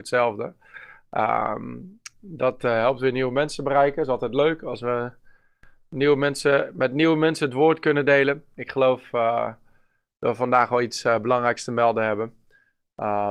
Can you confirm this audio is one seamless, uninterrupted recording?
yes; 0 cuts

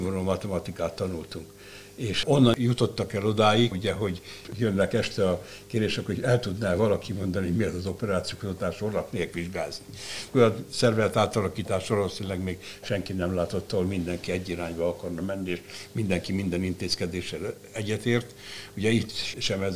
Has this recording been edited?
yes; 2 cuts; at 3.7 s, 10.3 s

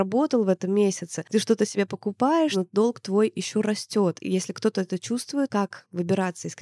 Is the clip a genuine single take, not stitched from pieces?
no; 1 cut; at 5.5 s

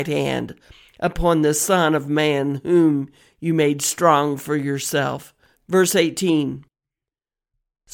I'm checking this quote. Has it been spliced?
yes; 1 cut; at 5.5 s

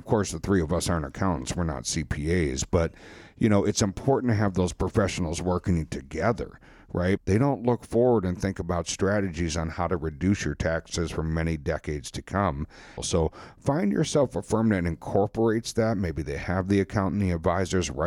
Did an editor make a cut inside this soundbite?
yes; 2 cuts; at 7.2 s, 13.0 s

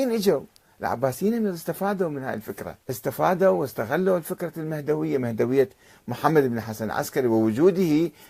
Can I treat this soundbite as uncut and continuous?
no; 1 cut; at 2.8 s

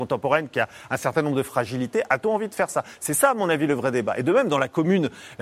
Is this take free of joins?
yes; 0 cuts

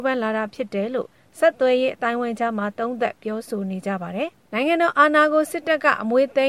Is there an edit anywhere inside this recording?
yes; 1 cut; at 4.5 s

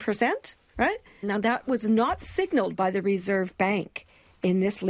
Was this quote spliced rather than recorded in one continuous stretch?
yes; 1 cut; at 1.2 s

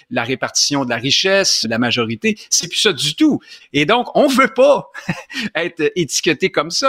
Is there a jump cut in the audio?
yes; 2 cuts; at 1.6 s, 3.6 s

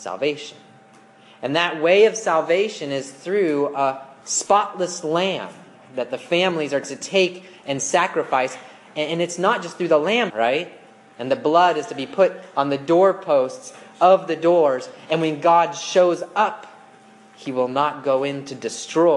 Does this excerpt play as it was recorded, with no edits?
no; 1 cut; at 10.3 s

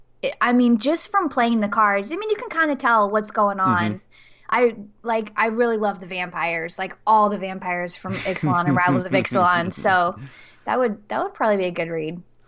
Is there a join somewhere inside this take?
no; 0 cuts

